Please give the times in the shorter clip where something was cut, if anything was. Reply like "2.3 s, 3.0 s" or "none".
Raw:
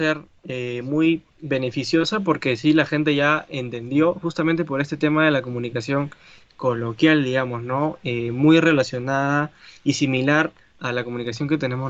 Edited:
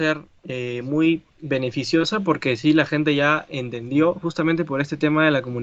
none